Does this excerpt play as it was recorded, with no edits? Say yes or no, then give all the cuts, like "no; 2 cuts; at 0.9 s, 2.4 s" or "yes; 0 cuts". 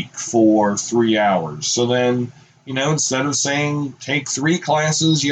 yes; 0 cuts